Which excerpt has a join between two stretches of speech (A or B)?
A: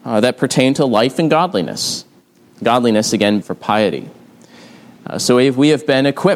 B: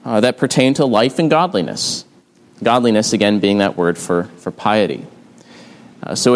A